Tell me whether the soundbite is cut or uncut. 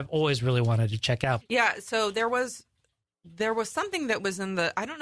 cut